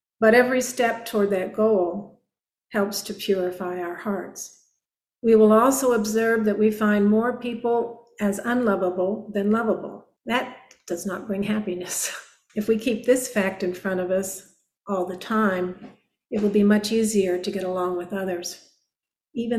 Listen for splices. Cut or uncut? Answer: cut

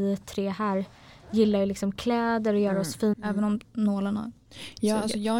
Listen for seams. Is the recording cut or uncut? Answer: cut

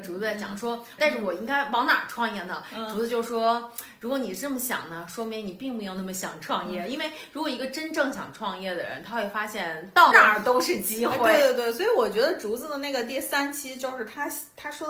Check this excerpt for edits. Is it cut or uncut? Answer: cut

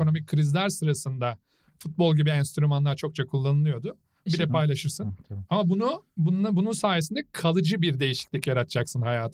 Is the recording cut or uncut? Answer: cut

